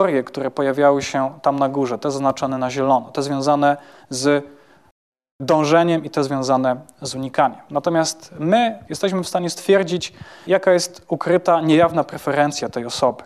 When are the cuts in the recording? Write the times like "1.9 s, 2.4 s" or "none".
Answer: 7.7 s, 8.9 s